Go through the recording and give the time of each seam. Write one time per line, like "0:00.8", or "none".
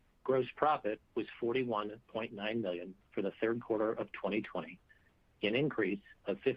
none